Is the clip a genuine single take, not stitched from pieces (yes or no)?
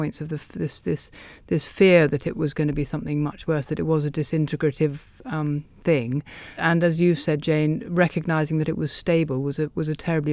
no